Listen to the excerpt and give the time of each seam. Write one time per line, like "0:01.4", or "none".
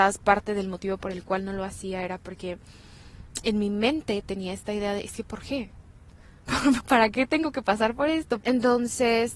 0:06.8
0:08.4